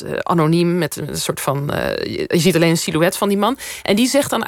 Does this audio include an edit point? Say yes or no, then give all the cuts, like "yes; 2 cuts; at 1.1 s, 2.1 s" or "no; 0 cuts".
no; 0 cuts